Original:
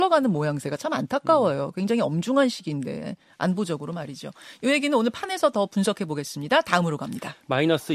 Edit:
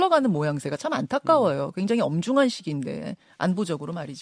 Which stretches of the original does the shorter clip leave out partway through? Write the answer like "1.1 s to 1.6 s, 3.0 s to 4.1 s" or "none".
none